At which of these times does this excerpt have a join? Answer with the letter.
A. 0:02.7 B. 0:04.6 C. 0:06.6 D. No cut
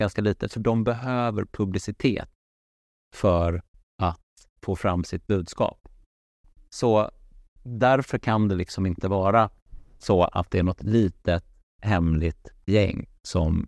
B